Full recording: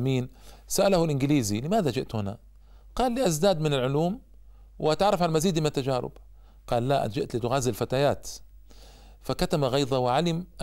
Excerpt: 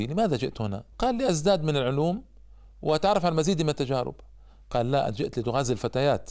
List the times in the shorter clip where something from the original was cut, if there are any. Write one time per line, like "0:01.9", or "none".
0:00.9